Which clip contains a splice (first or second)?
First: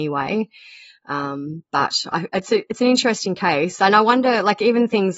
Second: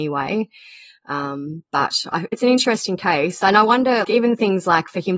second